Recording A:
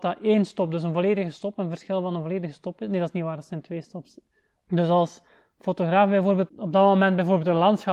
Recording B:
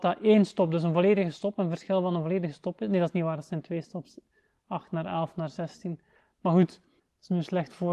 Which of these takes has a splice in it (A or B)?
A